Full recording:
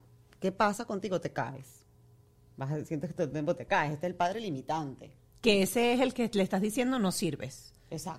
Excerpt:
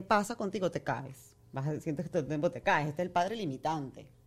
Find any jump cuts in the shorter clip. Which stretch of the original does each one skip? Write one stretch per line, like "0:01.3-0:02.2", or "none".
0:01.9-0:02.5